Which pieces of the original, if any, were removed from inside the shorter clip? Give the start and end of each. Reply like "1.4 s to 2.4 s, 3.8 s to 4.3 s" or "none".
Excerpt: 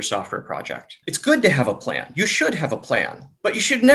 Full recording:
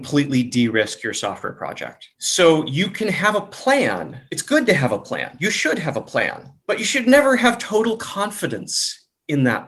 2.1 s to 4.3 s